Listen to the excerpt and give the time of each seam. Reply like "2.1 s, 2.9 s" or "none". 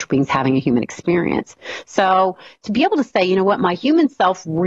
none